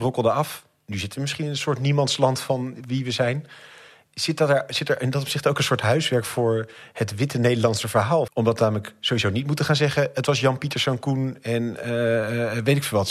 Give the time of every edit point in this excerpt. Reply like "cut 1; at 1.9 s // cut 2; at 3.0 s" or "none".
cut 1; at 8.3 s

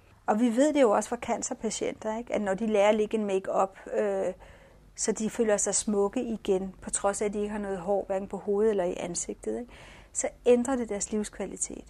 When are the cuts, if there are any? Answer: none

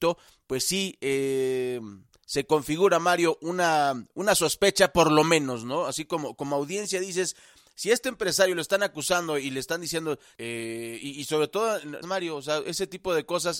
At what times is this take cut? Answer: cut 1; at 10.3 s // cut 2; at 12.0 s

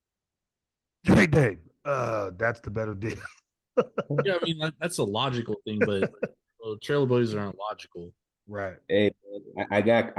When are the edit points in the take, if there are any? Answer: none

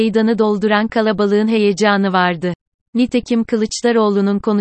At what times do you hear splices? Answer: cut 1; at 2.8 s

